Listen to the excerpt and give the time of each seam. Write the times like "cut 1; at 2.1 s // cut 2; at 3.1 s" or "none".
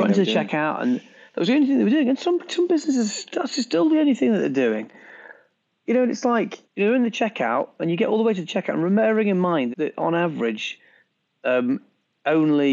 cut 1; at 6.6 s // cut 2; at 9.7 s